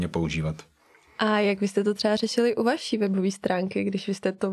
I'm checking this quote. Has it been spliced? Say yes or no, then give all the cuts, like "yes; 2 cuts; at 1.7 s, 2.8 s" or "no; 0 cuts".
no; 0 cuts